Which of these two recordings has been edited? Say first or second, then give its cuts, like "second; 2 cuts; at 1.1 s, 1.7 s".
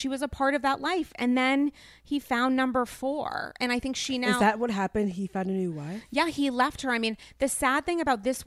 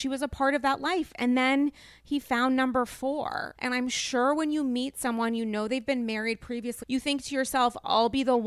second; 2 cuts; at 3.5 s, 6.8 s